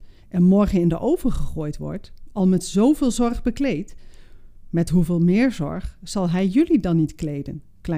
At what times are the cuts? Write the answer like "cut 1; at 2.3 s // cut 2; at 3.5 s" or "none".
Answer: none